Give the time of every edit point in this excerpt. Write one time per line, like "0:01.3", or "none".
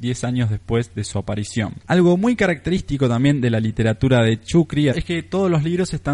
0:01.8
0:04.9